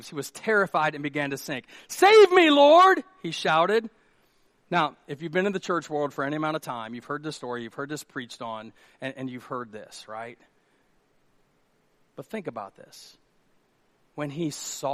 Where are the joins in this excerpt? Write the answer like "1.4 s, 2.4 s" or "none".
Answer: none

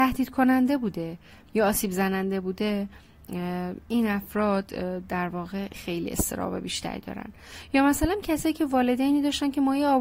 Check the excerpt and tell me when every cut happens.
5.7 s

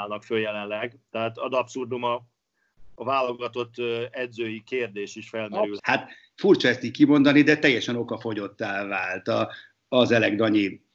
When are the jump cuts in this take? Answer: 5.8 s

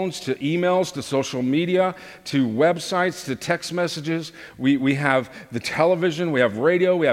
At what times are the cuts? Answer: 0.9 s, 4.8 s

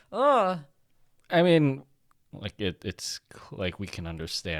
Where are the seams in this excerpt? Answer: 2.1 s

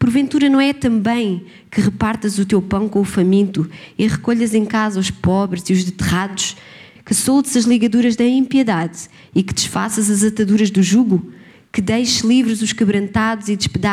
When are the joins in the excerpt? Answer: 7.0 s

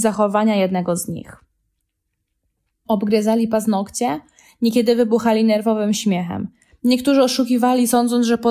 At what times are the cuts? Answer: 2.8 s

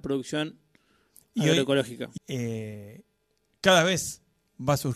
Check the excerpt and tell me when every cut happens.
2.2 s

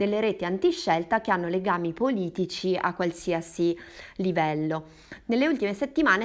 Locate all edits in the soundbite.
none

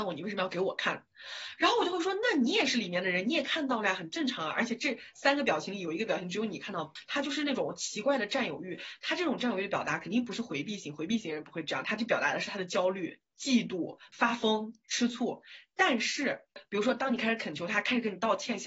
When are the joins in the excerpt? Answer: none

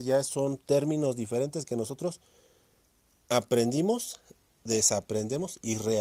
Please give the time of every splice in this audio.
none

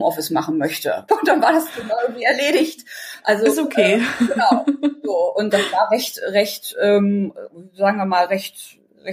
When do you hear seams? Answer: 1.1 s

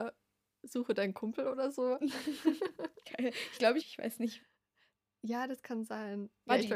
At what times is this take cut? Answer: 3.8 s

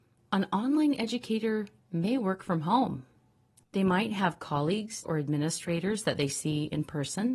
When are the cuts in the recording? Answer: 3.6 s, 5.0 s

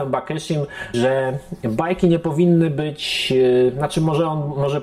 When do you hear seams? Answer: 0.9 s

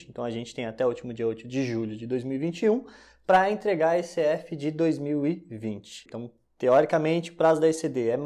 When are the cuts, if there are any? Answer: 6.1 s

